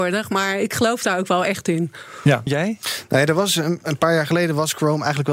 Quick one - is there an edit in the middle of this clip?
yes; 1 cut; at 2.5 s

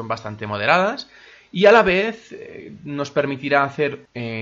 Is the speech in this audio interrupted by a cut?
no; 0 cuts

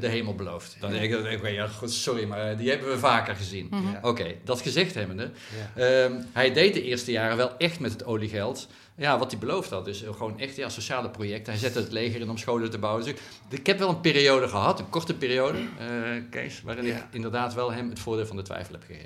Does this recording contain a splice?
no; 0 cuts

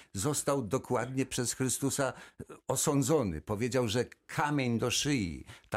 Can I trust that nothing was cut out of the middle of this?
yes; 0 cuts

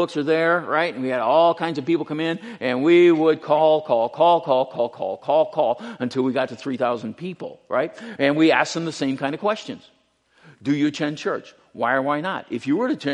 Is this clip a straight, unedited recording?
yes; 0 cuts

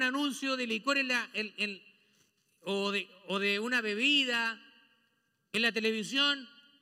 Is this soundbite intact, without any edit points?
yes; 0 cuts

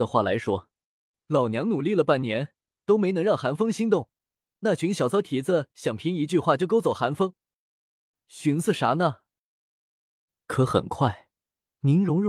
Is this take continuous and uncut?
yes; 0 cuts

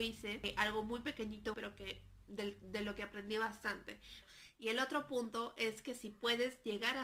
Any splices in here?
yes; 1 cut; at 1.5 s

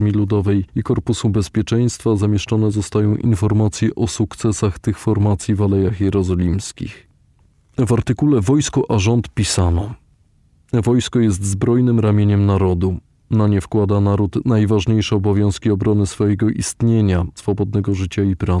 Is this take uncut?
no; 1 cut; at 17.4 s

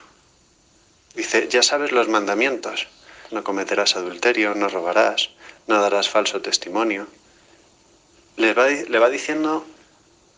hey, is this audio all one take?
no; 2 cuts; at 1.0 s, 3.3 s

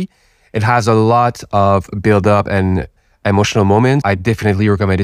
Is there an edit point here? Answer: yes; 1 cut; at 4.0 s

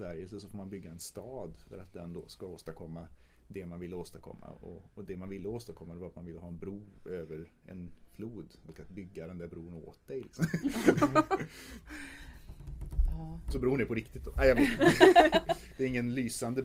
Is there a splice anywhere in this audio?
no; 0 cuts

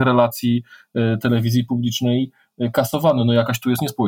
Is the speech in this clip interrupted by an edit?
no; 0 cuts

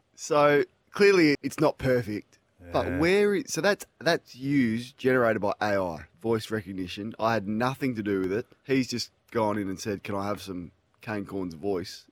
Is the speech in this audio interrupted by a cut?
yes; 1 cut; at 1.3 s

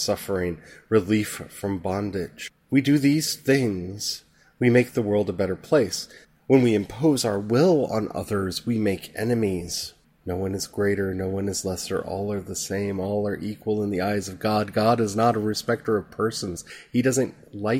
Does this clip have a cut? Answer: no; 0 cuts

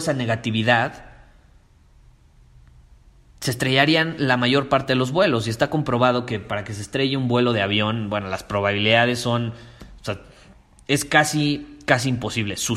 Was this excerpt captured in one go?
yes; 0 cuts

